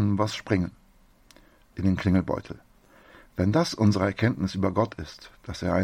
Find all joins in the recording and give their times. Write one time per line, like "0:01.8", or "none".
none